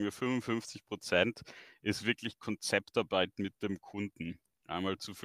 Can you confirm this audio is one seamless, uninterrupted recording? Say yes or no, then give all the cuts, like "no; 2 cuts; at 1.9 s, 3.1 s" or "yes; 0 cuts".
yes; 0 cuts